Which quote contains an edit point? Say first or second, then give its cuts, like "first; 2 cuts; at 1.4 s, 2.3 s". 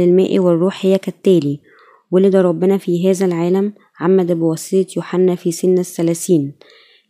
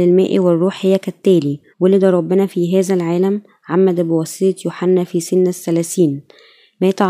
second; 1 cut; at 1.7 s